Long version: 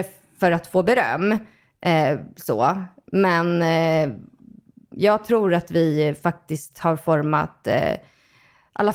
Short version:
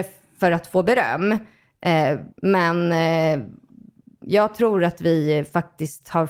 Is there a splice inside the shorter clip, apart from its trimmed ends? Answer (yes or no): yes